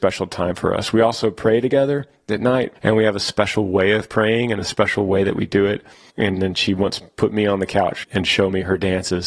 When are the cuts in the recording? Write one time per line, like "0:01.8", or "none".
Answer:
0:02.8
0:06.1
0:08.0